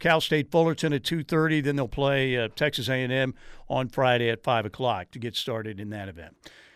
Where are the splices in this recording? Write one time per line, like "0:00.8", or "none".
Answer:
none